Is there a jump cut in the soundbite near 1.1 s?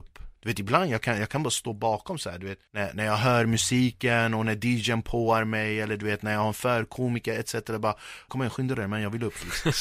no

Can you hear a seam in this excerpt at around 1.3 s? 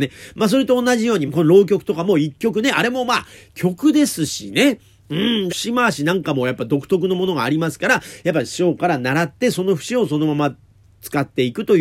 yes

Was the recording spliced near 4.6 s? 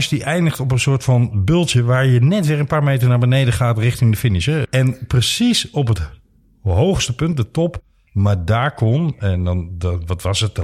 yes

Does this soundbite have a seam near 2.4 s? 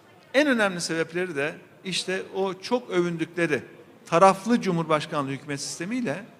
no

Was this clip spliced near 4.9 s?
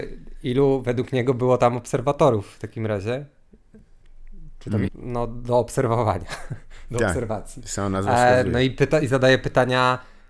yes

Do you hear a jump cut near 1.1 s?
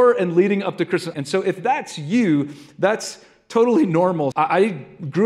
yes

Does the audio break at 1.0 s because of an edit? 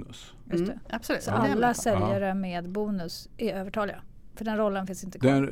no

